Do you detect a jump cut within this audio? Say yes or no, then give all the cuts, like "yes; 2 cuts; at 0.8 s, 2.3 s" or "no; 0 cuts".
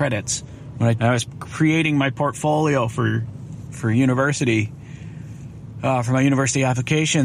yes; 1 cut; at 1.0 s